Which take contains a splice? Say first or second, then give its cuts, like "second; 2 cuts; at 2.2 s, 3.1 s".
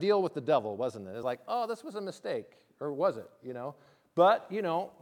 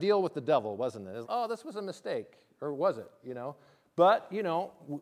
second; 1 cut; at 1.2 s